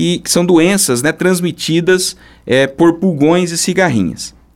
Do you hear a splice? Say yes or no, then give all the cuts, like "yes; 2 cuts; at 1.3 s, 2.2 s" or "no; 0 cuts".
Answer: no; 0 cuts